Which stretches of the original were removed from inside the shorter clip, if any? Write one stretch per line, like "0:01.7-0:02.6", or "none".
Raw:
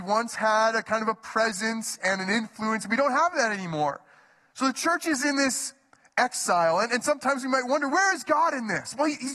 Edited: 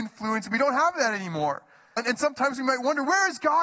0:04.3-0:06.8